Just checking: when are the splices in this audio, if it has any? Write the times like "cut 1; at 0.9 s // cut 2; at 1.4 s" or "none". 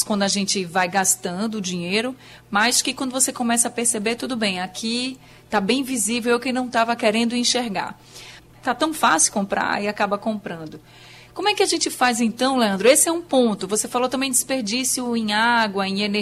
cut 1; at 8.4 s